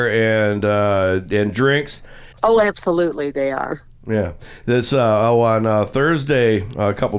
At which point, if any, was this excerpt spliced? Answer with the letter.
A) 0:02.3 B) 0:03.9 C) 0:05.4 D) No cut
A